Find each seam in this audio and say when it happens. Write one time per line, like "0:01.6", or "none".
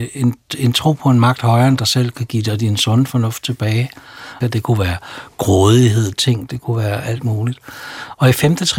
0:04.4
0:06.1